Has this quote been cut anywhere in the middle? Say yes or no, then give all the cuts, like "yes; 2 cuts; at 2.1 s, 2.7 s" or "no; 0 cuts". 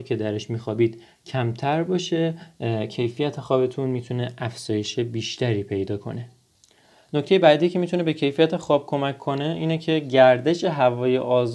no; 0 cuts